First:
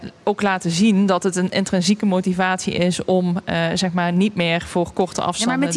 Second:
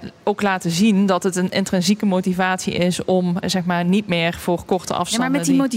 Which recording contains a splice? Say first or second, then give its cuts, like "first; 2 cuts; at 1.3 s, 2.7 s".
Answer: second; 1 cut; at 3.4 s